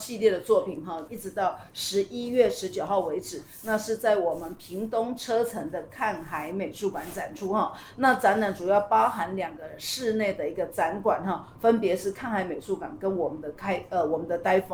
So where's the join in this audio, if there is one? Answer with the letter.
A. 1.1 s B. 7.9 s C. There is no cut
A